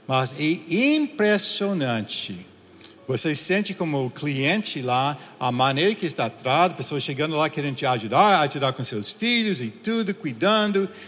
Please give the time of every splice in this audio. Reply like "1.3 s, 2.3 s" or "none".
none